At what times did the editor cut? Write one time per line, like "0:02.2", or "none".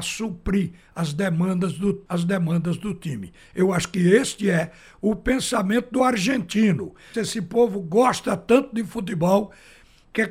0:02.1
0:07.1